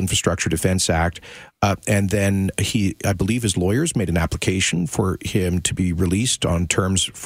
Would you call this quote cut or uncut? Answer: uncut